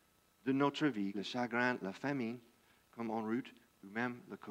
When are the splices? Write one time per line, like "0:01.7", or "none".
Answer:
0:01.1